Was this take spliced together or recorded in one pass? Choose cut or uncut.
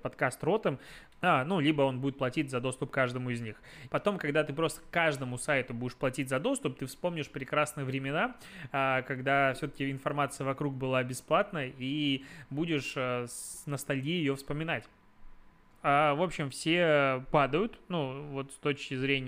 cut